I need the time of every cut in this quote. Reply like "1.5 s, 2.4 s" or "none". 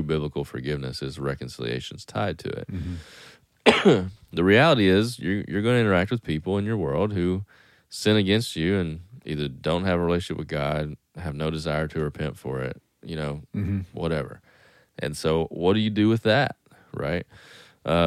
none